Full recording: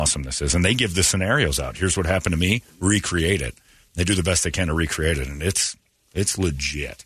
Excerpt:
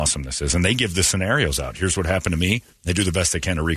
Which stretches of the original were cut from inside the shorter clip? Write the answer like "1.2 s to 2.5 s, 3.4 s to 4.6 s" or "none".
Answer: 2.7 s to 3.8 s